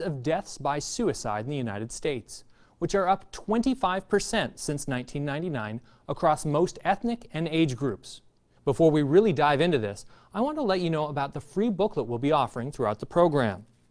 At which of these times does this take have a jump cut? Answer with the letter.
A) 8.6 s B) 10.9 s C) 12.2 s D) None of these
A